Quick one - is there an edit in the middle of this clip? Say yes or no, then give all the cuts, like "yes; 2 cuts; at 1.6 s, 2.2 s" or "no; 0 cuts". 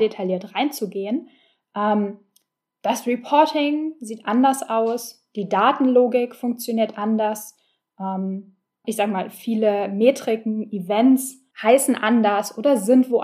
yes; 2 cuts; at 8.8 s, 11.5 s